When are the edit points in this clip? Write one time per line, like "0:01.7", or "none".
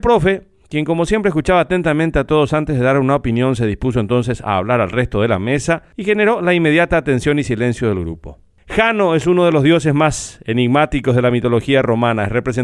none